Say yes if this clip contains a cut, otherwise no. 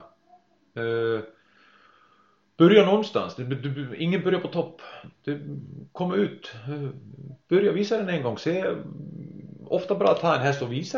no